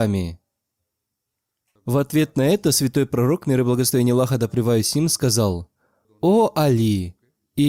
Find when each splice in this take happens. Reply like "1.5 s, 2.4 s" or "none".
1.8 s, 6.0 s